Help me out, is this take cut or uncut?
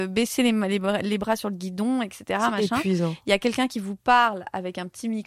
uncut